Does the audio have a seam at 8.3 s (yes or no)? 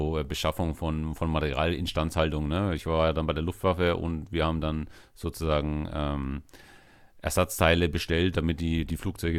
no